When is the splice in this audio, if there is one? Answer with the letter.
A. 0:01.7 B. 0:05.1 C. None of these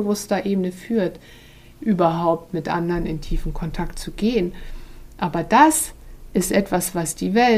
A